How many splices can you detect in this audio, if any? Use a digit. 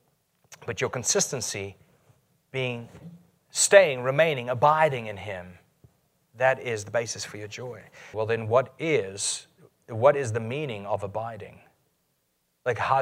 1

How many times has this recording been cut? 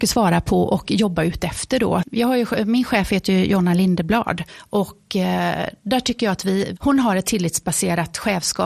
2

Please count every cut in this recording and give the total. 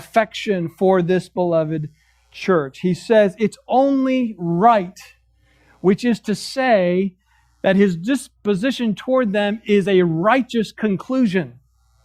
0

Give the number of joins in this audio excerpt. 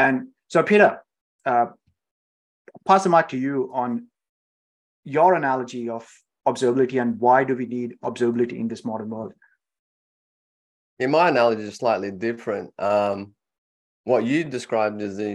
0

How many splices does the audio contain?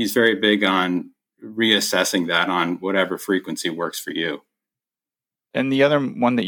1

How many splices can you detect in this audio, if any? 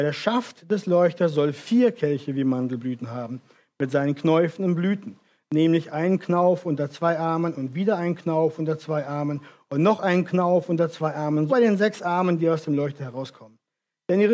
1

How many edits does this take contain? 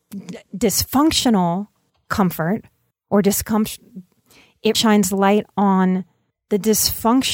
1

